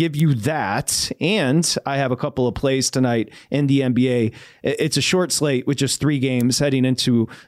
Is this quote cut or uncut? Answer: uncut